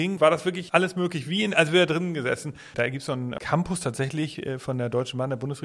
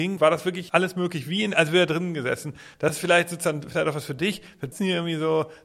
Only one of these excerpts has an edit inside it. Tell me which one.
first; 1 cut; at 2.7 s

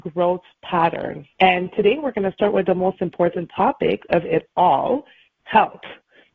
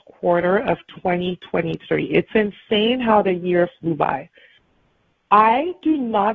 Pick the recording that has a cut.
first; 1 cut; at 1.3 s

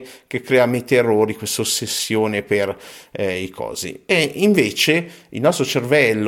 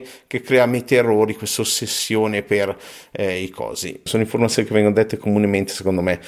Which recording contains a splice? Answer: second; 1 cut; at 4.1 s

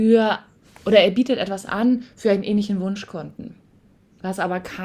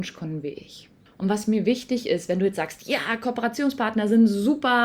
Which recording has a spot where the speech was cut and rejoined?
second; 1 cut; at 1.1 s

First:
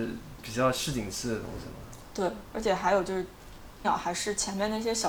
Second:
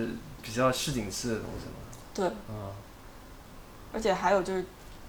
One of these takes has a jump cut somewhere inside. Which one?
first; 2 cuts; at 2.4 s, 3.8 s

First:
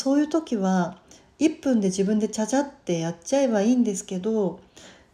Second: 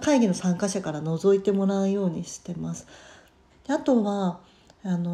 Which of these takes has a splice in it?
second; 1 cut; at 3.5 s

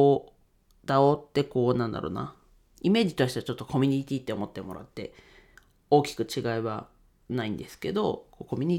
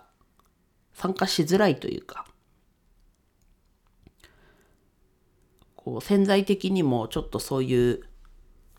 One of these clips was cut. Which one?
first; 1 cut; at 2.7 s

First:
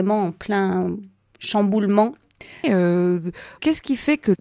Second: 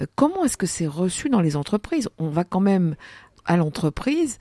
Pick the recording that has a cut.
first; 1 cut; at 2.6 s

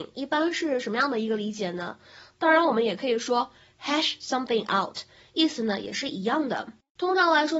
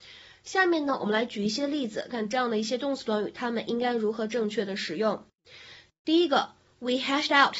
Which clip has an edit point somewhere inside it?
second; 1 cut; at 2.1 s

